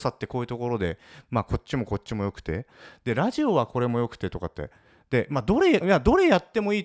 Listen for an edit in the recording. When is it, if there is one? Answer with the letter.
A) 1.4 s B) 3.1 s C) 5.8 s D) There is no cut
C